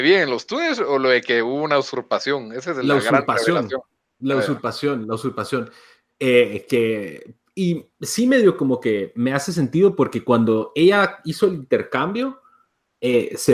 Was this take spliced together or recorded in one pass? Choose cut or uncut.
uncut